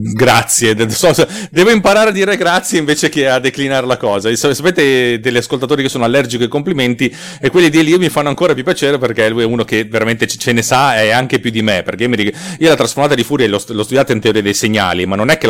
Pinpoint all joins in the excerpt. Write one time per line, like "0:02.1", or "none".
none